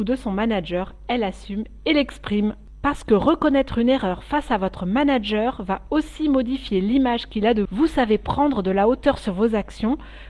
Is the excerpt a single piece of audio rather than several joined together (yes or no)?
no